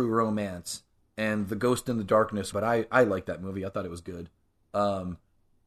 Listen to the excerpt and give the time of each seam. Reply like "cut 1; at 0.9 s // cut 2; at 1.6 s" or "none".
cut 1; at 2.5 s